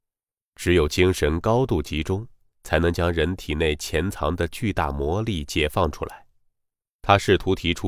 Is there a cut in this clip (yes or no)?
yes